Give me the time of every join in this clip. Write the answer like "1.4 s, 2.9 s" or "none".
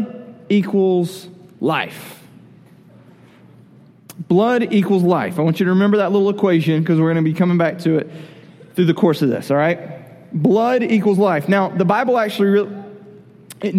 none